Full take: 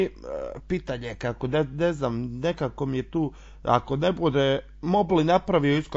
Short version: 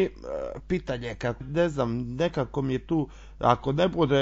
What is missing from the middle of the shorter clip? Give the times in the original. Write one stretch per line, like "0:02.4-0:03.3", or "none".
0:01.4-0:01.6